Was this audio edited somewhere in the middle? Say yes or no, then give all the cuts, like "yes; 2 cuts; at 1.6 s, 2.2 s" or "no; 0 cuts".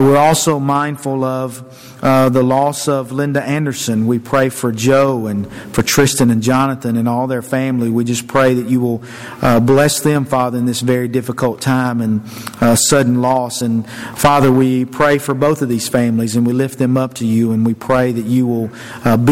no; 0 cuts